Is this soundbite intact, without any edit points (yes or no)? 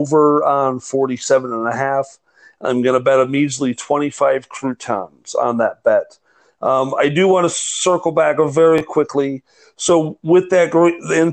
yes